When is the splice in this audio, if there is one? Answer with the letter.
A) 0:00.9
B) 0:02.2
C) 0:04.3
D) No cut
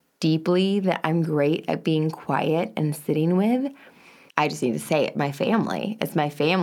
C